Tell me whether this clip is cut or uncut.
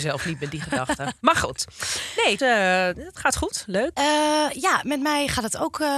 cut